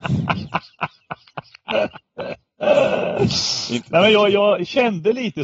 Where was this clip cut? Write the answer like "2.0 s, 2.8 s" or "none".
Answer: none